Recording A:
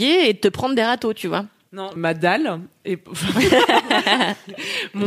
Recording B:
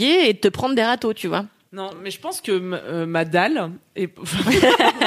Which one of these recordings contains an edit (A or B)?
A